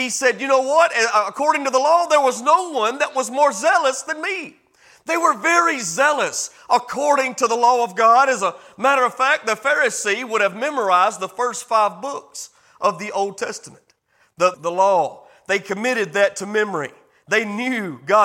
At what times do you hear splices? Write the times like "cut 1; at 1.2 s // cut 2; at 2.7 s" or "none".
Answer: cut 1; at 14.5 s